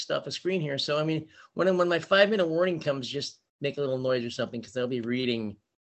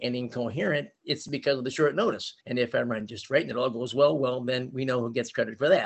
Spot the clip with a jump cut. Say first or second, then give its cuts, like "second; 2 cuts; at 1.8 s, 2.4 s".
second; 1 cut; at 2.4 s